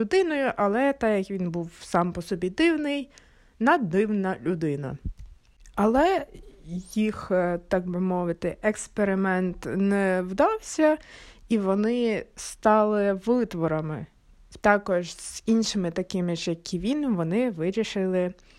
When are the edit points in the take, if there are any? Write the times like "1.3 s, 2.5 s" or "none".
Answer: 14.6 s